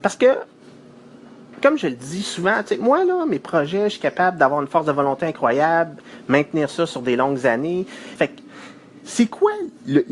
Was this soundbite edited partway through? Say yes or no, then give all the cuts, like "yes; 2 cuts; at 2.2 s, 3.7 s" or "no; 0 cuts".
yes; 1 cut; at 8.2 s